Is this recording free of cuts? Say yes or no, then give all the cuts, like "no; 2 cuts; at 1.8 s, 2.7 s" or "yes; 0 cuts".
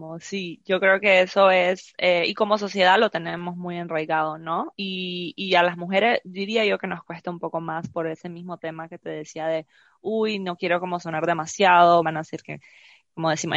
no; 2 cuts; at 4.7 s, 12.0 s